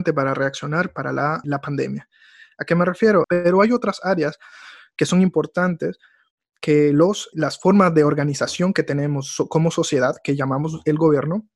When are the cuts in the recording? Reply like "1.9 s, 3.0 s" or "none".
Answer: 1.4 s, 3.2 s, 7.3 s